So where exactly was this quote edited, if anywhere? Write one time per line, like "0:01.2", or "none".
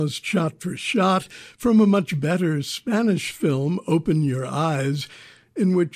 none